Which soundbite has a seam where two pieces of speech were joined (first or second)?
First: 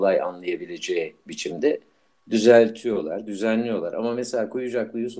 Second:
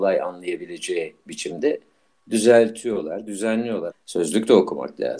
second